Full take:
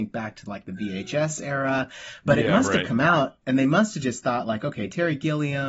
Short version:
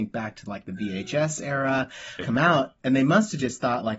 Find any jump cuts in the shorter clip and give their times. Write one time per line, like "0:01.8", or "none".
0:02.2